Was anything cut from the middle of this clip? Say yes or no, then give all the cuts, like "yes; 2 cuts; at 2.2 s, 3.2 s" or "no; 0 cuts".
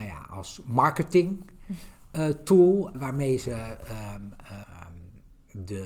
yes; 2 cuts; at 2.9 s, 4.6 s